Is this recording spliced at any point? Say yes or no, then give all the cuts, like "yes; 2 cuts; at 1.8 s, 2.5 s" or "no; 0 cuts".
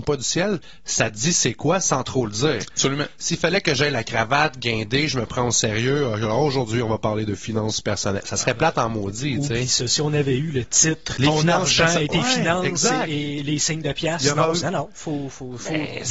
yes; 2 cuts; at 11.2 s, 14.6 s